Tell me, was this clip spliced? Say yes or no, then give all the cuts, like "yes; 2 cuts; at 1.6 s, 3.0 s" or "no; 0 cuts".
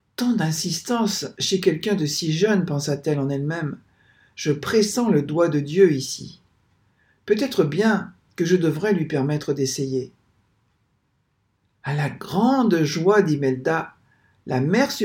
no; 0 cuts